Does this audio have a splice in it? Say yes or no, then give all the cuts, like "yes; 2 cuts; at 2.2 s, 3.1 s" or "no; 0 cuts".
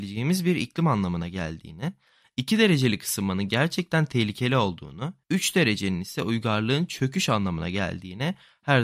yes; 1 cut; at 5.2 s